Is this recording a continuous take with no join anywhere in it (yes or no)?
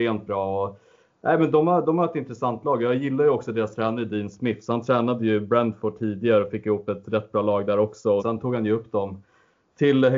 no